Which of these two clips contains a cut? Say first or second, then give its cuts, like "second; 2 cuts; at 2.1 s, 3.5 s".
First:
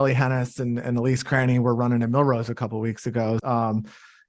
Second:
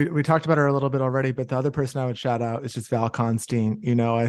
first; 1 cut; at 3.4 s